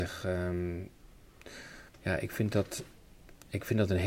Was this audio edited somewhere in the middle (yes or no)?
yes